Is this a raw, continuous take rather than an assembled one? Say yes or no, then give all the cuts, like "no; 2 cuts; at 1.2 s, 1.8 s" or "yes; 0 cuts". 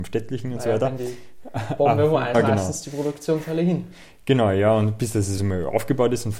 no; 2 cuts; at 2.3 s, 5.4 s